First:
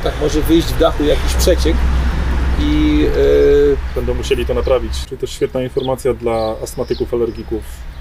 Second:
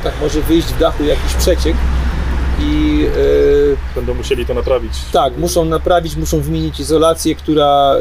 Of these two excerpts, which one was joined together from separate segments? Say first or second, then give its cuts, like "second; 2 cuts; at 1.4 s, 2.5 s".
first; 1 cut; at 5.0 s